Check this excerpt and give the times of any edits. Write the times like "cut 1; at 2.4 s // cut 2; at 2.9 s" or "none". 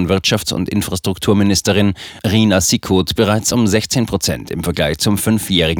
none